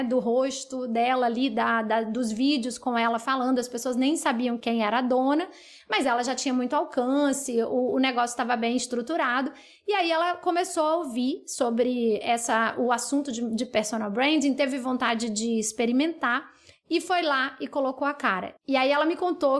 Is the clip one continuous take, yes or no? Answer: yes